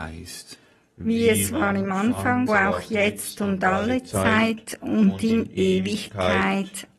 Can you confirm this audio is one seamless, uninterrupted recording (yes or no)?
no